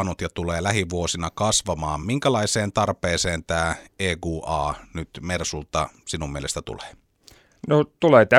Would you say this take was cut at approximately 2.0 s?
no; 0 cuts

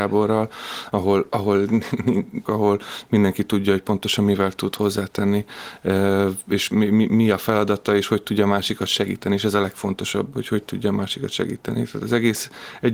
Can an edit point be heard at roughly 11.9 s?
no; 1 cut; at 2.5 s

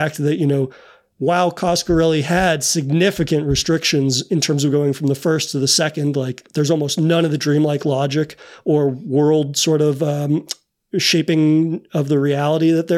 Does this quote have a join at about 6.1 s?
no; 0 cuts

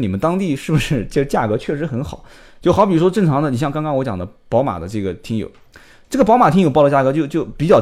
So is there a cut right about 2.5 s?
yes; 1 cut; at 2.5 s

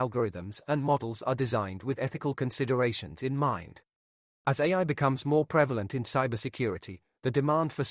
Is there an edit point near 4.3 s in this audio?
yes; 1 cut; at 4.3 s

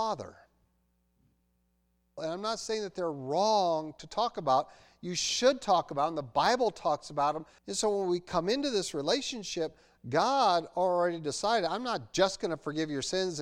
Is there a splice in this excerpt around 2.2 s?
yes; 2 cuts; at 2.2 s, 7.6 s

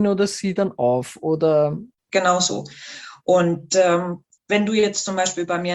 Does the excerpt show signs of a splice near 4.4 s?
yes; 1 cut; at 4.4 s

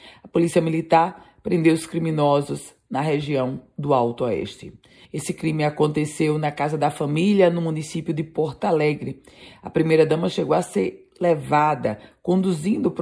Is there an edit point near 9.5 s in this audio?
no; 1 cut; at 5.0 s

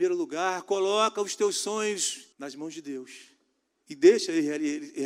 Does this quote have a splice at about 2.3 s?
yes; 1 cut; at 2.3 s

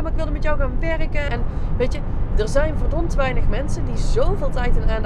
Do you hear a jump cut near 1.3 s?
yes; 2 cuts; at 1.3 s, 2.3 s

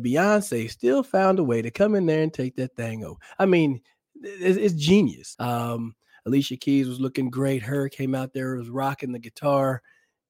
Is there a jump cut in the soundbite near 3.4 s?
no; 1 cut; at 5.3 s

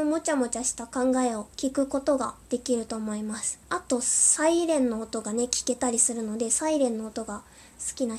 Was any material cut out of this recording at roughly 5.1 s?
no; 2 cuts; at 1.5 s, 3.6 s

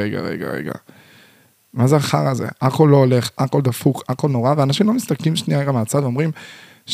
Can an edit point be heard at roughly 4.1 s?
yes; 1 cut; at 4.1 s

